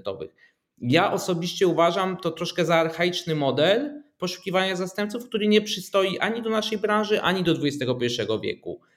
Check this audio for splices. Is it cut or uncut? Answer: uncut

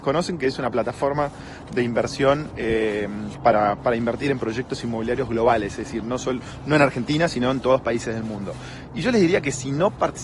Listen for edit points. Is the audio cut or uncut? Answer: uncut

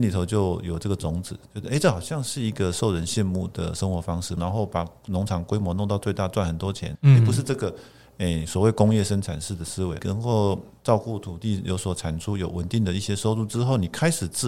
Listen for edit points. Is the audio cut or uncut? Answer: cut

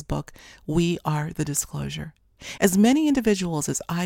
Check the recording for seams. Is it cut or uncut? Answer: cut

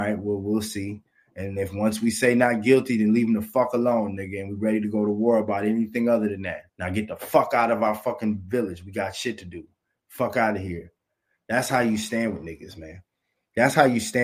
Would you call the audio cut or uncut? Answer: cut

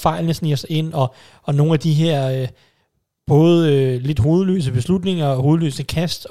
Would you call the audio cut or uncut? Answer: uncut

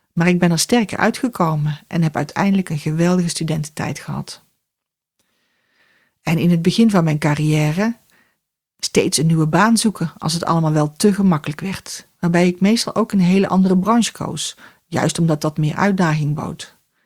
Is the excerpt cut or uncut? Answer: uncut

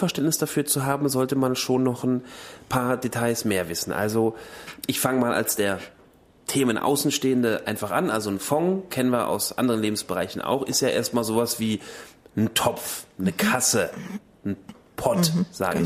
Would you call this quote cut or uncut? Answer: uncut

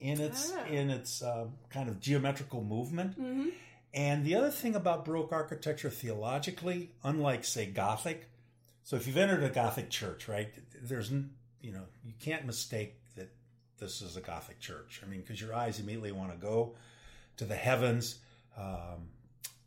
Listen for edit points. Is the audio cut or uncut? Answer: uncut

